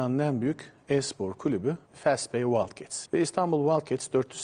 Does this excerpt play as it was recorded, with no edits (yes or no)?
no